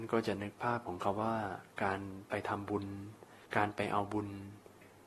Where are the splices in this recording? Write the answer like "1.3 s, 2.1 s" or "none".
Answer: 3.4 s